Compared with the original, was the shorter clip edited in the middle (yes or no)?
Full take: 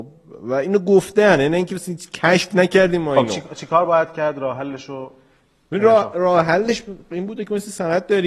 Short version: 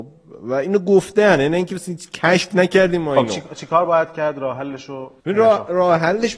yes